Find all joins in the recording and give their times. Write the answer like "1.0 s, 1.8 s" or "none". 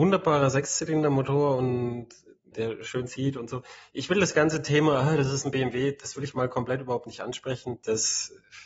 2.5 s